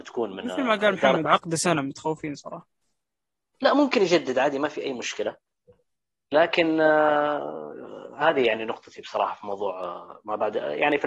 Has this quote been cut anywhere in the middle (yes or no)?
yes